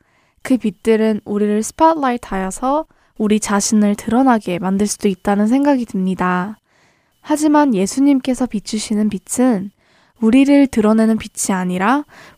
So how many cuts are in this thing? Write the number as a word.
zero